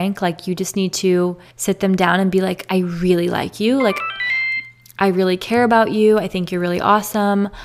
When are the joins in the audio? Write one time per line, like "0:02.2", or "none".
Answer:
0:01.5